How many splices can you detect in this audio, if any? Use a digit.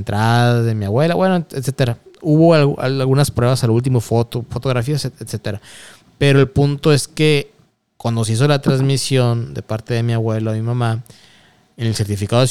0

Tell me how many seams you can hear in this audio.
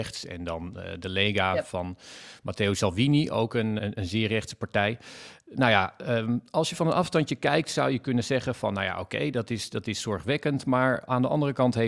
1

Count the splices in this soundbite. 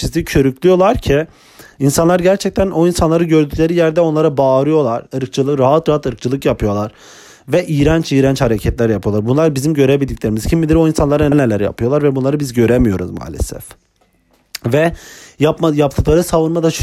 2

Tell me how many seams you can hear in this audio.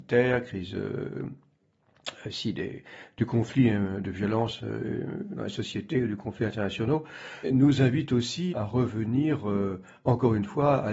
2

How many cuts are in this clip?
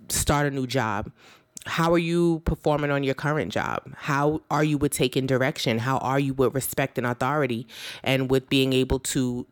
0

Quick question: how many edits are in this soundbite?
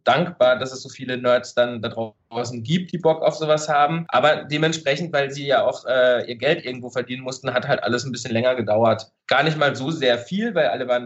0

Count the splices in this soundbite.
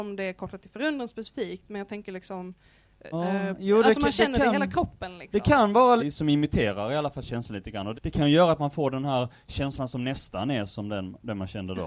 3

